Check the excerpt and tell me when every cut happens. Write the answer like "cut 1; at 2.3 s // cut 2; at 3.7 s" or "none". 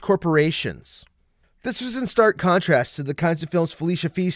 none